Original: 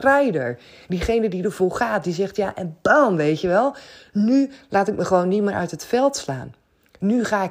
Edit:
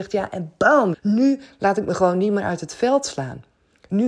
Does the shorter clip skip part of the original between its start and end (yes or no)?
yes